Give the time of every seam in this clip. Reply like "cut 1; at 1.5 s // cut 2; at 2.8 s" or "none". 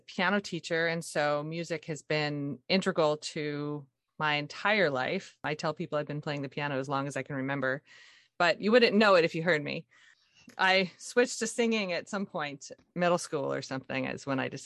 none